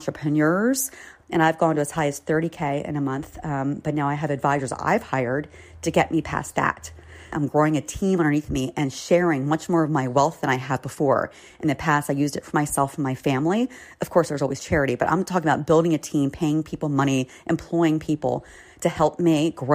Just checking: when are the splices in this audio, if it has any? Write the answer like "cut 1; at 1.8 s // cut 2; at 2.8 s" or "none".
cut 1; at 1.2 s // cut 2; at 7.3 s